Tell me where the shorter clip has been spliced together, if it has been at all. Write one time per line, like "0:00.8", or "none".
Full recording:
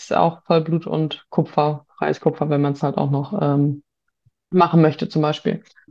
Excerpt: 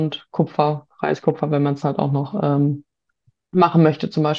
none

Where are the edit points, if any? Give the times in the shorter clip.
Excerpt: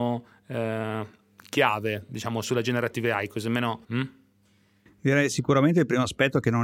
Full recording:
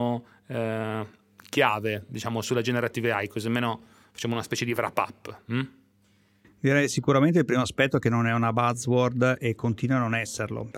0:03.8

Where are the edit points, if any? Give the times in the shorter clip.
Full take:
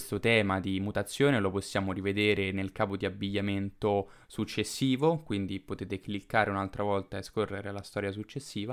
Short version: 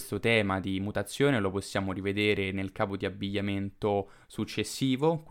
none

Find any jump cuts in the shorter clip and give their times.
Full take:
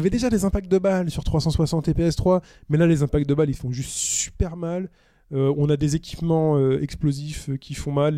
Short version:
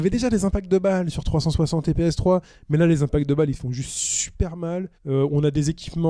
0:04.9

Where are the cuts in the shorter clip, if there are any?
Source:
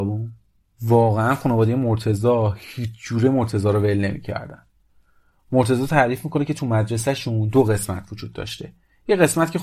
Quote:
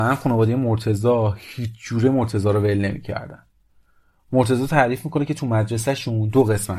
none

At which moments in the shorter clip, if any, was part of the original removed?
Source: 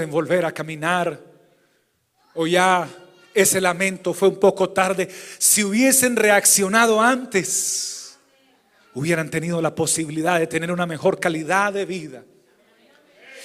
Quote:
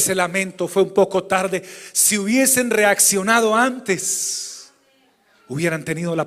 none

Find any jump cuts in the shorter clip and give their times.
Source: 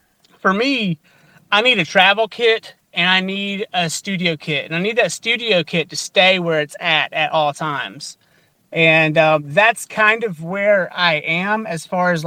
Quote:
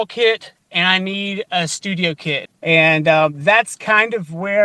0:02.5

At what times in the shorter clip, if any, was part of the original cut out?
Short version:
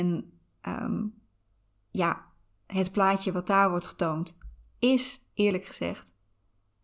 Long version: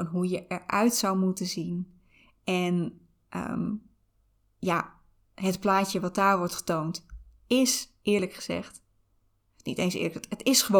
none

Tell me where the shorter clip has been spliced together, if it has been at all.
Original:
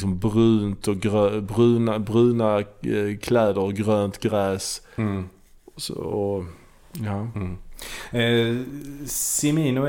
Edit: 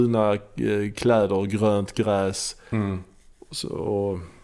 none

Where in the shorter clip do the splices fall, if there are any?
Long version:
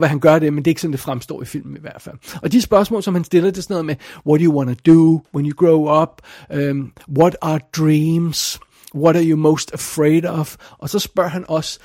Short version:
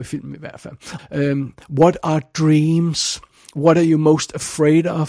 0:01.0

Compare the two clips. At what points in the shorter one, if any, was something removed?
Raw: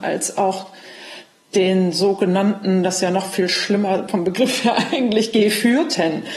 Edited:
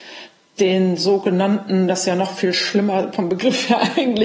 none

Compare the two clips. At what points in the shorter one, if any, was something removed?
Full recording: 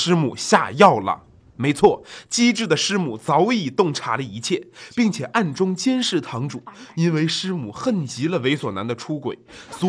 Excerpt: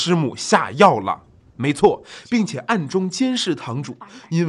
0:02.2

